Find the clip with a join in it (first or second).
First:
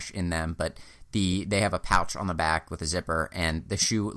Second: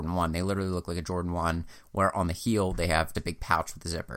second